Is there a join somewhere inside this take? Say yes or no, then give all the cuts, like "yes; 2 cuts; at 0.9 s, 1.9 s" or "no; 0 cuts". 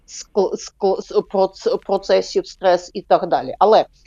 yes; 1 cut; at 1.0 s